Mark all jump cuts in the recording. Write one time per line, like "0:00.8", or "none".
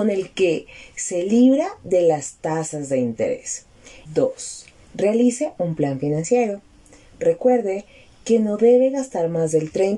0:04.1